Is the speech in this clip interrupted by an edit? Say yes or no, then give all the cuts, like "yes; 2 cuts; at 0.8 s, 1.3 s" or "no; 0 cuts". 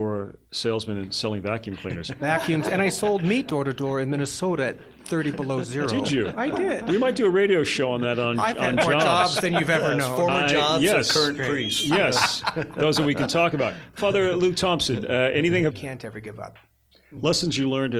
yes; 1 cut; at 15.7 s